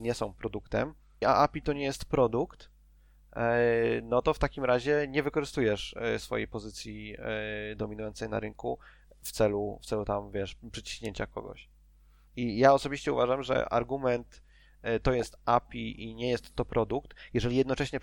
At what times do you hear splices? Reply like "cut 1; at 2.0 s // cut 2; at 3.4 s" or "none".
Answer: cut 1; at 1.2 s